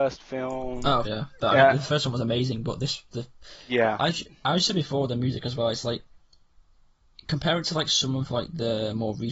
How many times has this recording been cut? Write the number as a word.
one